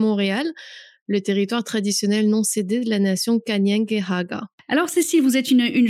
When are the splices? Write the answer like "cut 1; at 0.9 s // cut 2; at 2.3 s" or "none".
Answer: none